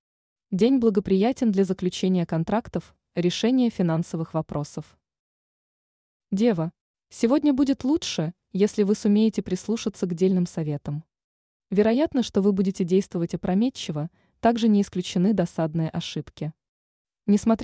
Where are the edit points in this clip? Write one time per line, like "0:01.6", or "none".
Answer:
none